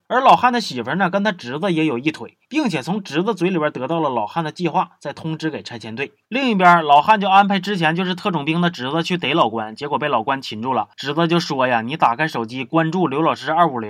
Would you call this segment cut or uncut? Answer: uncut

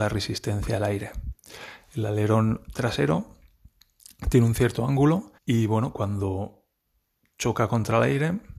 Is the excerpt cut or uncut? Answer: cut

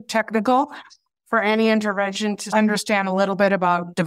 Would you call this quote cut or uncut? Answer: cut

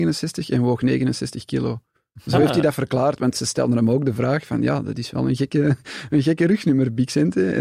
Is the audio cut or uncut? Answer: uncut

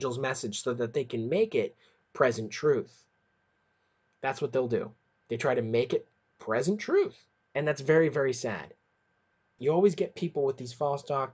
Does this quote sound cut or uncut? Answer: cut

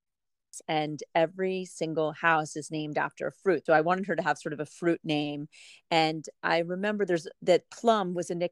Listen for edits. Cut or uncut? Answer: cut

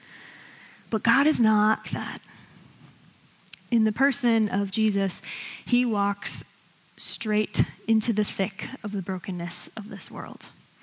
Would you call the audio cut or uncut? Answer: cut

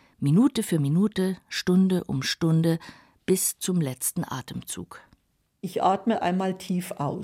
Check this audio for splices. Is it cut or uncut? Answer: uncut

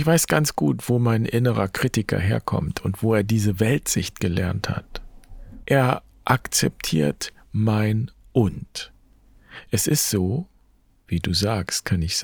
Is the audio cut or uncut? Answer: cut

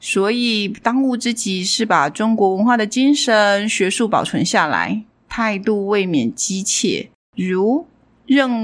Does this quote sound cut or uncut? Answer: cut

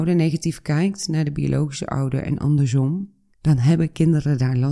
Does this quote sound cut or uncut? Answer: cut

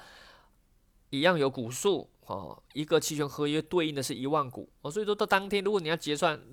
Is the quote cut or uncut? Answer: uncut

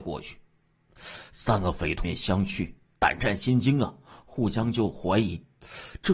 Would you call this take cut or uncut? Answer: cut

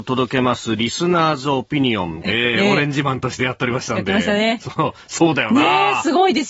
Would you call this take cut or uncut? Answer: cut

